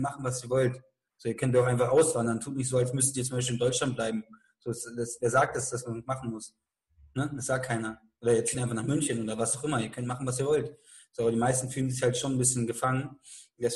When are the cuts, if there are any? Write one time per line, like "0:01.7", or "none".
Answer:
none